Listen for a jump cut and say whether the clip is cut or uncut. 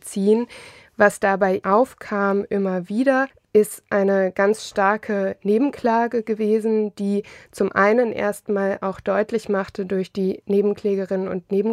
uncut